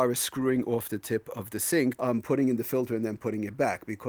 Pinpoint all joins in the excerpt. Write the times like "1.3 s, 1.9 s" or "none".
2.0 s

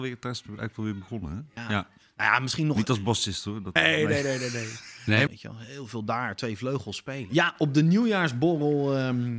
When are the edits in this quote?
3.8 s, 5.3 s

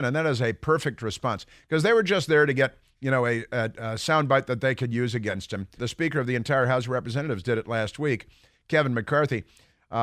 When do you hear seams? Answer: 5.8 s

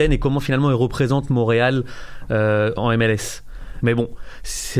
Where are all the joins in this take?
3.8 s

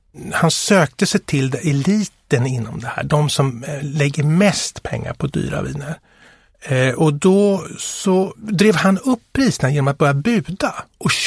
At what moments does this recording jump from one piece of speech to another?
none

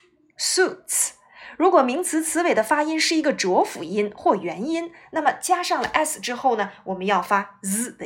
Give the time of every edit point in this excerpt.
none

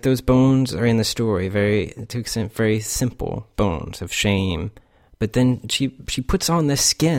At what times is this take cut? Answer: none

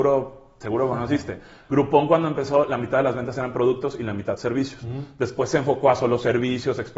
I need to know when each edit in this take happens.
none

